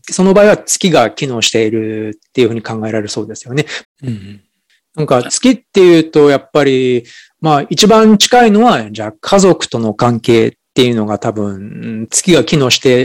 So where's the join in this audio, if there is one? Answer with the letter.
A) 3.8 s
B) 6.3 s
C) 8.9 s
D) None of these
A